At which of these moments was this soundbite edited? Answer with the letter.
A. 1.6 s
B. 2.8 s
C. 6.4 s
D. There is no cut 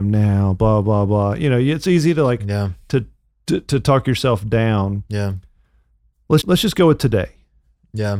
C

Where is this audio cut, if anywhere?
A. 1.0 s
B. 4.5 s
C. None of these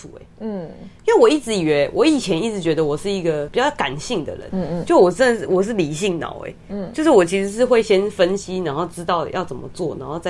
B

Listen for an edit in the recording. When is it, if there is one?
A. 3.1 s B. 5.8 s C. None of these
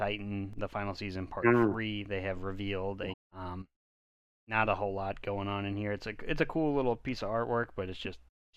A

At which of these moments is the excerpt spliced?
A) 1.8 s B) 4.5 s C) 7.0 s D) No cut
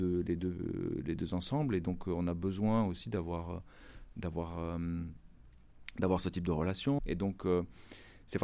C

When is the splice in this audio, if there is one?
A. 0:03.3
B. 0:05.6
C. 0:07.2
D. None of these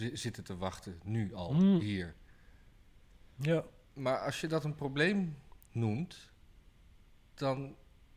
B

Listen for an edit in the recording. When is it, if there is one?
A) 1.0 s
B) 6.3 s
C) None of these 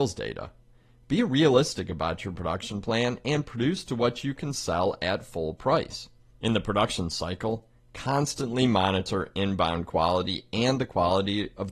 B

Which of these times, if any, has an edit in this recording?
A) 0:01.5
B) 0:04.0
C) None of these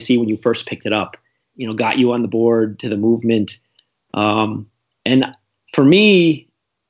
A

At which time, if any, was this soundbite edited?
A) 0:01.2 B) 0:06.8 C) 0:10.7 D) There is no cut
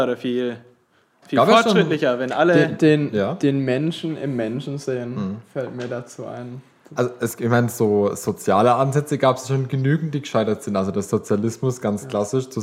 A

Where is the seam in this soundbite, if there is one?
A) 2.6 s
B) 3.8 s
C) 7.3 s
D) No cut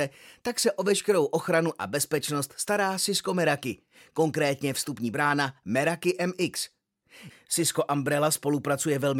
C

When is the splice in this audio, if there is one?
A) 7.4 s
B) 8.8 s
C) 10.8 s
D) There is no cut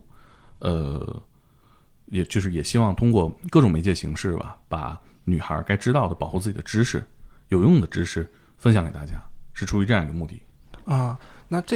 D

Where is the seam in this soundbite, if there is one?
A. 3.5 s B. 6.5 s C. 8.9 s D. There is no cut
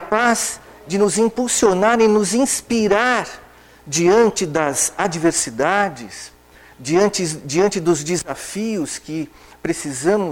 D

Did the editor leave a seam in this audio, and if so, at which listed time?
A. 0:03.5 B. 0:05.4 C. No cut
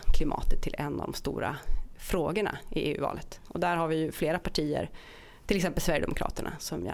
A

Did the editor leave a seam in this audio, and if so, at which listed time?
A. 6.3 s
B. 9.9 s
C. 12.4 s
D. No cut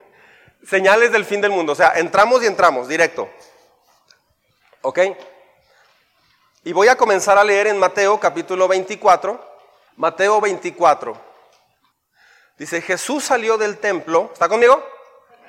B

